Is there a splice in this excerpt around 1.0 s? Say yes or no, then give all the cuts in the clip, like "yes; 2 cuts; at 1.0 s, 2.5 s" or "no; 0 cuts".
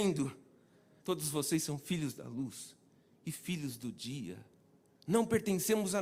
yes; 1 cut; at 1.0 s